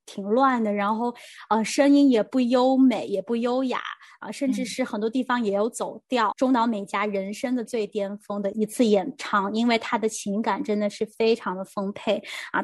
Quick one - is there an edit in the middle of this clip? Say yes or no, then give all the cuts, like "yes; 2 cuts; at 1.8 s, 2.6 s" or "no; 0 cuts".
yes; 2 cuts; at 6.3 s, 7.7 s